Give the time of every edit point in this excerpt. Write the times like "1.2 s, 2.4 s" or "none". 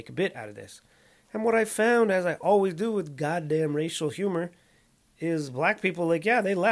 none